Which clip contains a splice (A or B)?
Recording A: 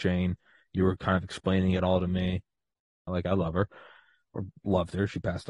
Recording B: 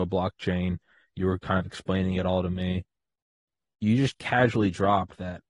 A